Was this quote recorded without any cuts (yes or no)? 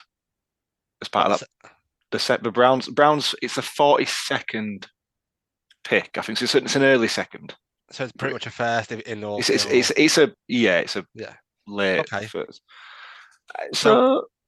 yes